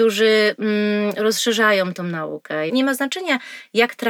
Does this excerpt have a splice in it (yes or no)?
yes